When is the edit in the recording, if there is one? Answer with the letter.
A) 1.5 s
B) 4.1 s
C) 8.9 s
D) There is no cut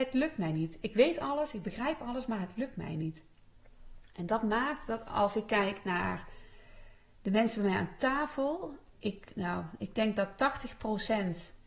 C